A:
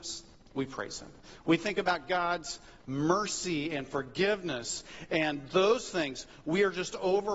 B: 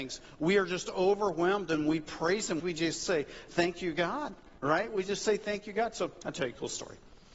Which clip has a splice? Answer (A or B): B